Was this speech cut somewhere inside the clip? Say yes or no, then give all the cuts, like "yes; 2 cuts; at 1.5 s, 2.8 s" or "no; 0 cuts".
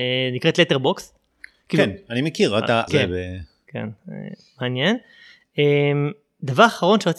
yes; 1 cut; at 2.9 s